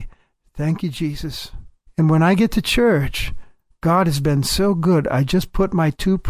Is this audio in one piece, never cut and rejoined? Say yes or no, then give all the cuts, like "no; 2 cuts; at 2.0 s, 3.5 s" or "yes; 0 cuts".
no; 1 cut; at 1.9 s